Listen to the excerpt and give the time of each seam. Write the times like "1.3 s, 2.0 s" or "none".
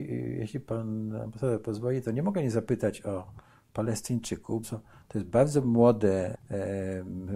4.6 s, 6.3 s